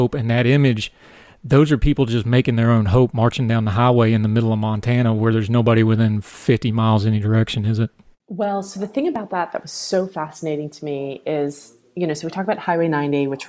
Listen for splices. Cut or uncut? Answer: uncut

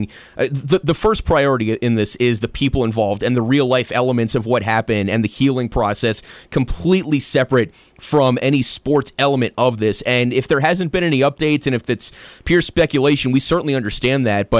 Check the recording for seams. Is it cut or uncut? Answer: uncut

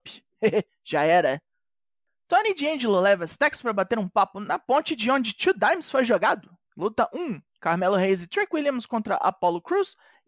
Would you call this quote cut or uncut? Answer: cut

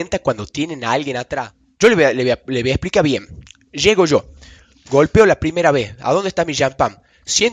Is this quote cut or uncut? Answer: uncut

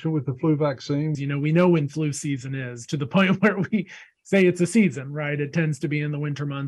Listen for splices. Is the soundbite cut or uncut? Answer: cut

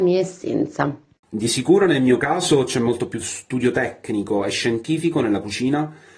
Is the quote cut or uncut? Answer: cut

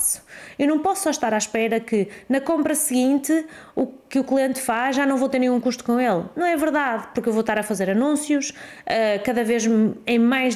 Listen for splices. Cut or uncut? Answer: uncut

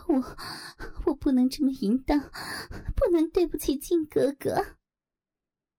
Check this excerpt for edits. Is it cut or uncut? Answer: uncut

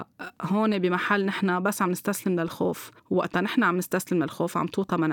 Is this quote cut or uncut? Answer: cut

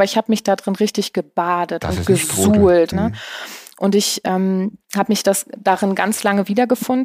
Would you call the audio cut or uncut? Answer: cut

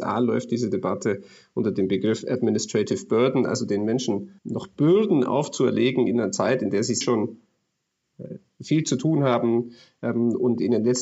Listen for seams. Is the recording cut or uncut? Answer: cut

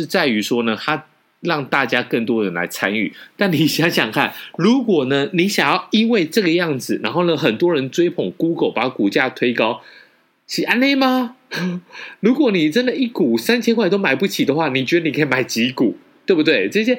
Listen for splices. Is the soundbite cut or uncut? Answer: uncut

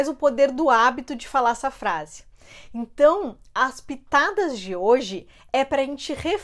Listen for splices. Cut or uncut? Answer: uncut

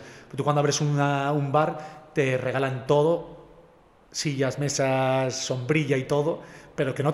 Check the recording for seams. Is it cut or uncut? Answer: uncut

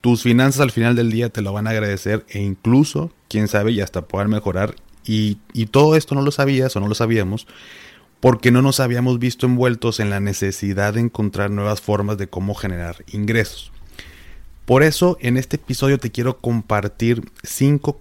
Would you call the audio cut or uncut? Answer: uncut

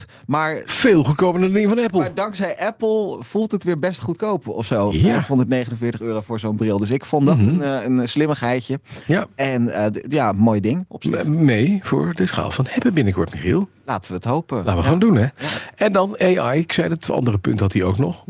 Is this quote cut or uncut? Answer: uncut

